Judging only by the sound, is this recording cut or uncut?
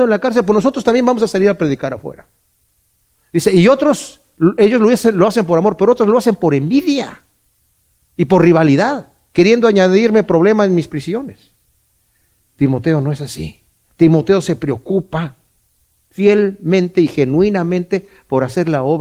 uncut